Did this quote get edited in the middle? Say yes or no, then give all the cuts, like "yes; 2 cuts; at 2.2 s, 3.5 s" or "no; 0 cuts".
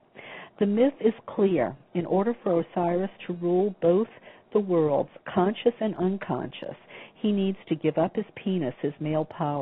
yes; 1 cut; at 5.2 s